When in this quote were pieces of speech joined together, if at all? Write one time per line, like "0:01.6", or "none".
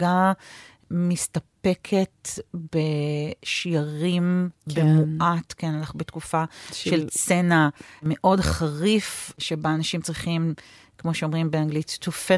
none